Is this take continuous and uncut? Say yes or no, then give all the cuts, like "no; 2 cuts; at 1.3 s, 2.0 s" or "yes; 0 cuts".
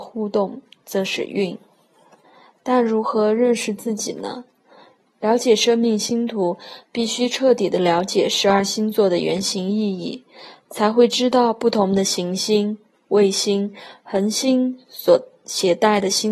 no; 2 cuts; at 2.2 s, 5.0 s